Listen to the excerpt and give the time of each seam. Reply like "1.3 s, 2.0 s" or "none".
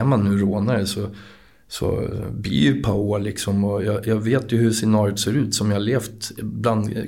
none

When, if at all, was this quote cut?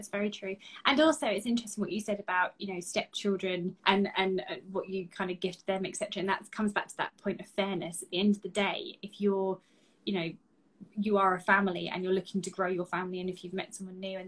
3.8 s

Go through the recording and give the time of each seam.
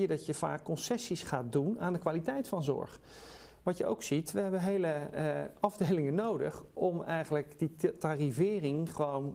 none

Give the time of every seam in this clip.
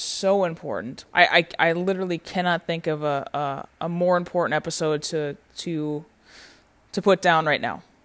1.1 s

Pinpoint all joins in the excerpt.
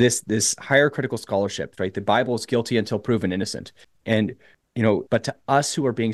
1.8 s, 5.1 s

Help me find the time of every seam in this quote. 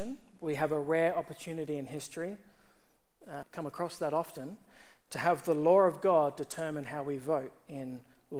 3.4 s

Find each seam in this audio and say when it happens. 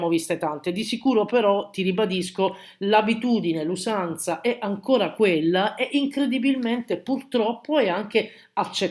none

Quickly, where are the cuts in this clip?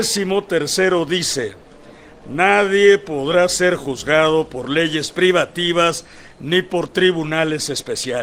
none

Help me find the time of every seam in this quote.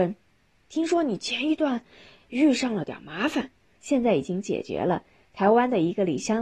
3.8 s

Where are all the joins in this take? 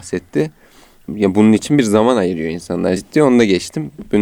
3.0 s

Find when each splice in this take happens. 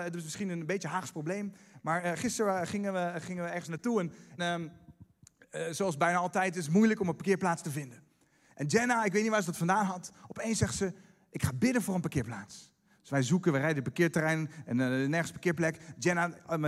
4.4 s

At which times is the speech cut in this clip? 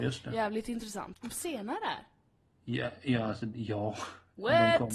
1.1 s

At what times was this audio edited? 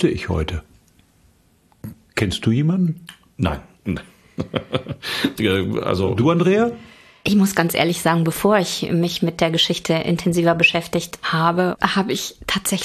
5.4 s

